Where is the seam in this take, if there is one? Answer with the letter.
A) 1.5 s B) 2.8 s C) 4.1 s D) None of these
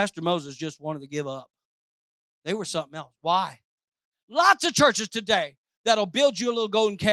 C